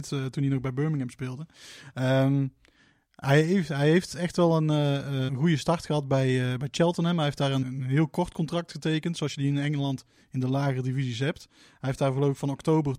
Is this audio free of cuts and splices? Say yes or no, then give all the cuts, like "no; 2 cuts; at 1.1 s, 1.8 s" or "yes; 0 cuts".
no; 2 cuts; at 5.3 s, 7.6 s